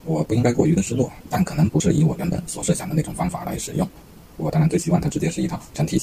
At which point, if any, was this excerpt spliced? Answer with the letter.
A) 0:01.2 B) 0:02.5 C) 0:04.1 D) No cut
A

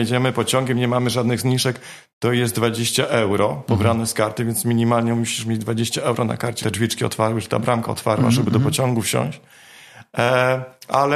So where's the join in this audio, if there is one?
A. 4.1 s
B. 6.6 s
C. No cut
B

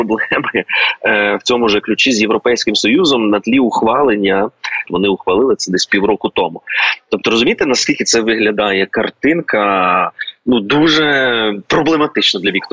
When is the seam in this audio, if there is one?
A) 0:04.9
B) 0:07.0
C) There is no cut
A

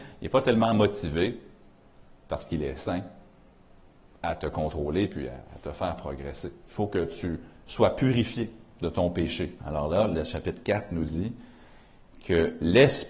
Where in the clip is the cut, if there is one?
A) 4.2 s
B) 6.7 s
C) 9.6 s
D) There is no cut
C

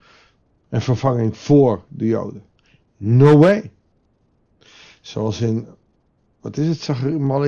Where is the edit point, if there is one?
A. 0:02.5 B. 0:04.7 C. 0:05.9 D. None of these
D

